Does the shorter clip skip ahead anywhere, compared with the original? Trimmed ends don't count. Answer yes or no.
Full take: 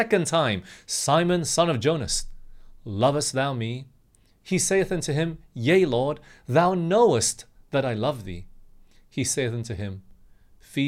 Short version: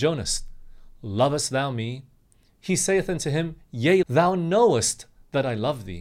yes